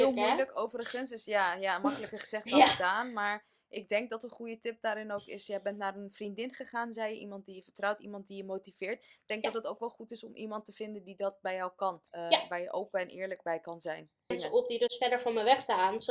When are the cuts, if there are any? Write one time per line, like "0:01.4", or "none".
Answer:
0:12.1
0:14.3